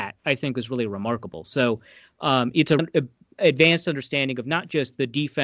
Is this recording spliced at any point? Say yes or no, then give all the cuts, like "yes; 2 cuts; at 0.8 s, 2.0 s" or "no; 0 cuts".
yes; 1 cut; at 2.8 s